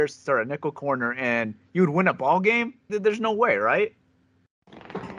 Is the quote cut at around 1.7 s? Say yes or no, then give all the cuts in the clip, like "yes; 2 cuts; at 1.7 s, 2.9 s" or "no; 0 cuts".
no; 1 cut; at 2.9 s